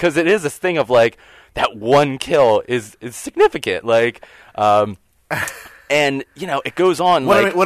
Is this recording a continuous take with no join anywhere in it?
yes; 0 cuts

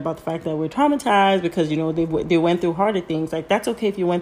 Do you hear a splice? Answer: no; 0 cuts

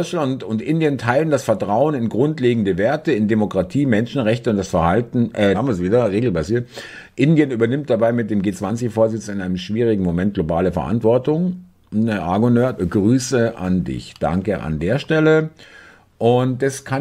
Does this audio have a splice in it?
yes; 2 cuts; at 5.5 s, 12.8 s

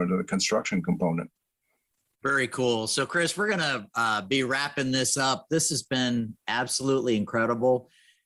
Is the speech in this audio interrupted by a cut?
no; 0 cuts

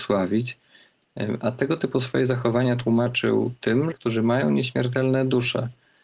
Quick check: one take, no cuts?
no; 1 cut; at 3.9 s

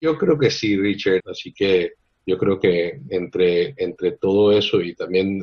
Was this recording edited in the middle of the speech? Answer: yes; 1 cut; at 1.2 s

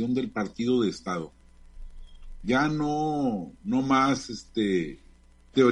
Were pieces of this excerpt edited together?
no; 0 cuts

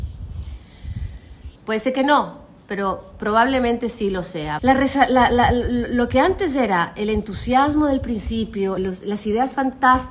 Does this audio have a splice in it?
yes; 3 cuts; at 1.6 s, 4.6 s, 8.8 s

